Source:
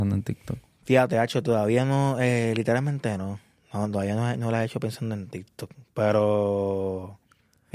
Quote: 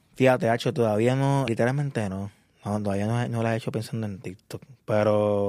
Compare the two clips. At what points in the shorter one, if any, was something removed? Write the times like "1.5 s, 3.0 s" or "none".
1.5 s